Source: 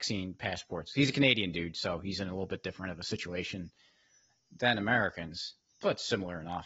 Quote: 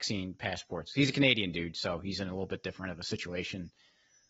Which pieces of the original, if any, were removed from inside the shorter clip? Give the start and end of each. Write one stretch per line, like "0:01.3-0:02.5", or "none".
none